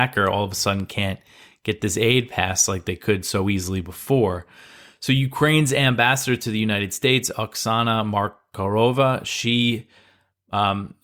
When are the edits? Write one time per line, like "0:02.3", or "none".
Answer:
none